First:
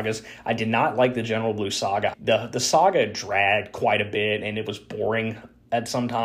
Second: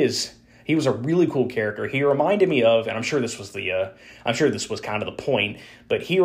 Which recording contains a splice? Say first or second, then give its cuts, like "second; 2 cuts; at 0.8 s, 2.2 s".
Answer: first; 1 cut; at 2.1 s